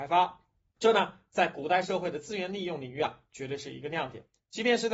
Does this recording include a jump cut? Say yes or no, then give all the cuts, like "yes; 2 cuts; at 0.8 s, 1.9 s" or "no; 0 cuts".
no; 0 cuts